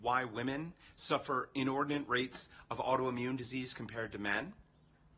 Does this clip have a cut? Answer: no; 0 cuts

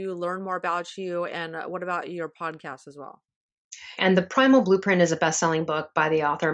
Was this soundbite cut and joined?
yes; 1 cut; at 4.0 s

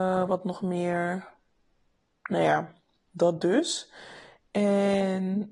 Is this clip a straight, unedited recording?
yes; 0 cuts

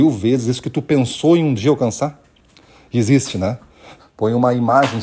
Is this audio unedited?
no; 1 cut; at 4.0 s

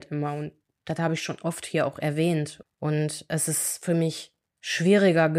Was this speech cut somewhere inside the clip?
yes; 1 cut; at 2.6 s

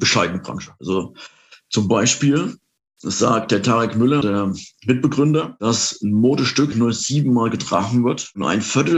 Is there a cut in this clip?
yes; 2 cuts; at 4.2 s, 6.7 s

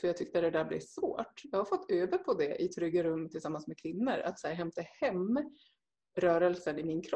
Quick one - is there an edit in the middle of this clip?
no; 0 cuts

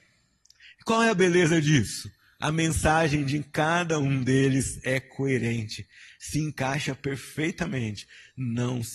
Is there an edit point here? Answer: no; 0 cuts

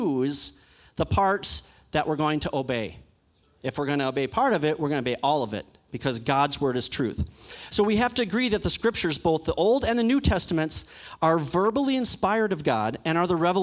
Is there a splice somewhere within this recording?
no; 0 cuts

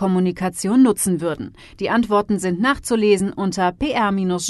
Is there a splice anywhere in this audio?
yes; 1 cut; at 1.7 s

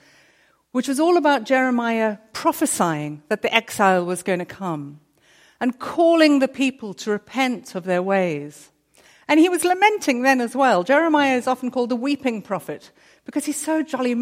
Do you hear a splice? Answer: no; 0 cuts

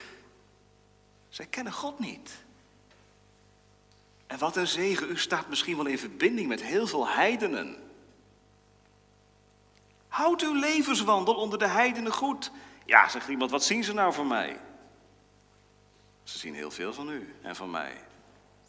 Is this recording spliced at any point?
no; 0 cuts

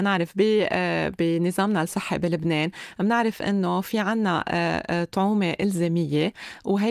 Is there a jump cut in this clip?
no; 0 cuts

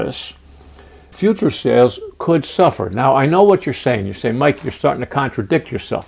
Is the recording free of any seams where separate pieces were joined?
no; 1 cut; at 1.1 s

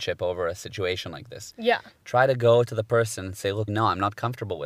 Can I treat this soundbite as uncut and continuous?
no; 1 cut; at 3.7 s

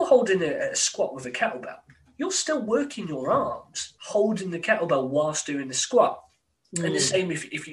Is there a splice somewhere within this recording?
no; 0 cuts

